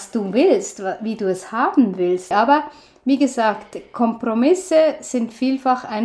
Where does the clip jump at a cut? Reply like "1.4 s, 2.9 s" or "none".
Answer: 2.3 s